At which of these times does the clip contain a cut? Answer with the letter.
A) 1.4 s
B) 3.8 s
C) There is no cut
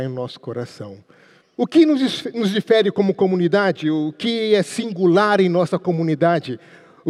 A